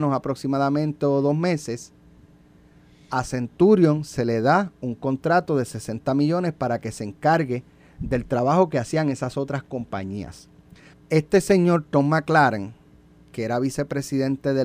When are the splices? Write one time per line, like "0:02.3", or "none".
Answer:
0:10.9

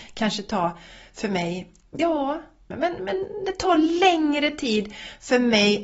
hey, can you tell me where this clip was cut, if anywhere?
0:02.7

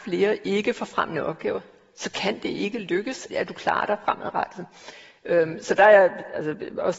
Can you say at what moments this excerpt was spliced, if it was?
0:03.3

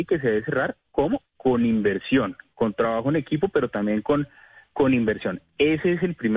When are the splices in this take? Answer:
none

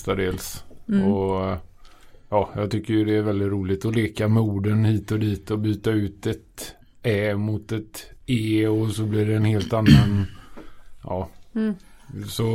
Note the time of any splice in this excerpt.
none

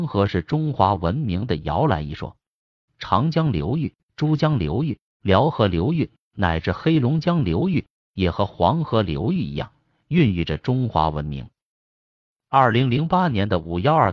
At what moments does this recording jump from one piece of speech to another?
0:02.9

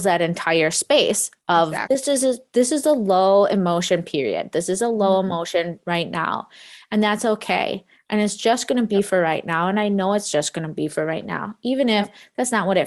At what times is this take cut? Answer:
0:01.9

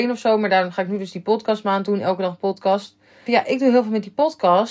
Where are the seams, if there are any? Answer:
0:03.3

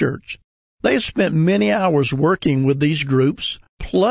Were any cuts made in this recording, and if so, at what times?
none

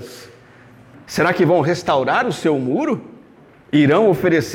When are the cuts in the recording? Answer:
0:00.9

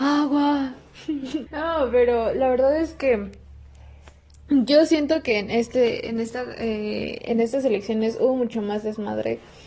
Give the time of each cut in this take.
0:01.5

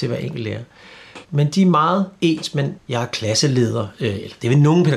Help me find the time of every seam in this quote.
0:01.2
0:02.8

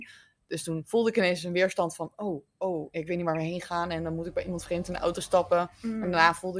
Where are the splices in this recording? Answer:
none

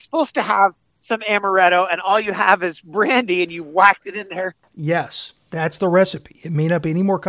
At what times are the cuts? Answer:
none

